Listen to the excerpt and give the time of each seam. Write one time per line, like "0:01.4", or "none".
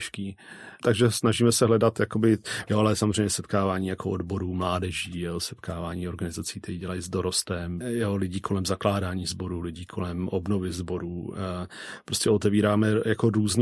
0:07.8